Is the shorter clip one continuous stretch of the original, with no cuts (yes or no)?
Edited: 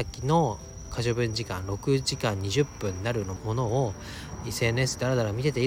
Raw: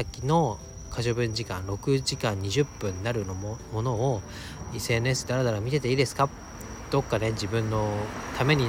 no